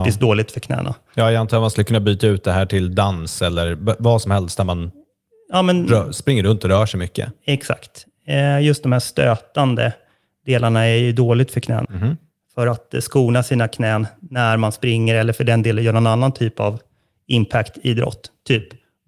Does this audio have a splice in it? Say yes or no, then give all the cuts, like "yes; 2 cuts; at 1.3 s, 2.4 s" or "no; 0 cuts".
yes; 1 cut; at 11.8 s